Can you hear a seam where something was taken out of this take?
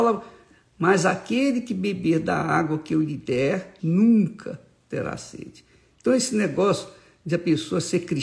yes; 1 cut; at 3.8 s

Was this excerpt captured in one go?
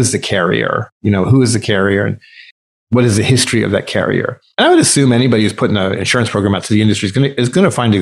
yes; 0 cuts

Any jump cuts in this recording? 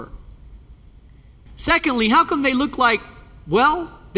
yes; 1 cut; at 1.5 s

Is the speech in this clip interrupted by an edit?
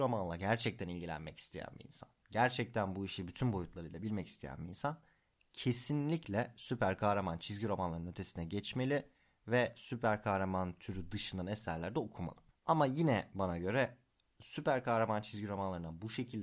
no; 0 cuts

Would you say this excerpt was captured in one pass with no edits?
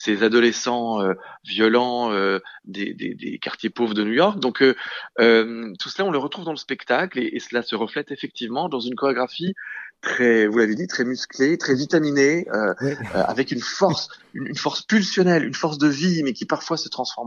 yes; 0 cuts

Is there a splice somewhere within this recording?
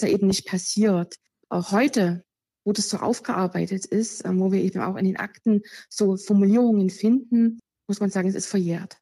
no; 0 cuts

